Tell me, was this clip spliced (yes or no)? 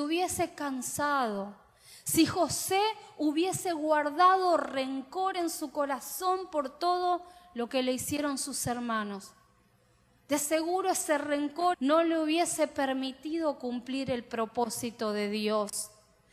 yes